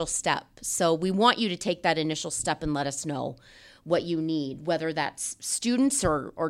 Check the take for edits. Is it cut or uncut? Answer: uncut